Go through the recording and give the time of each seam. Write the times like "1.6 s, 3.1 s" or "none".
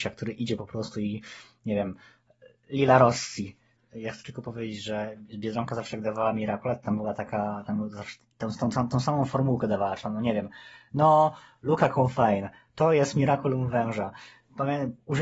3.8 s